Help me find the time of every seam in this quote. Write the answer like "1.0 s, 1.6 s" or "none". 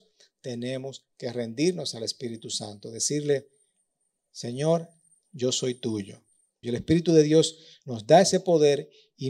6.6 s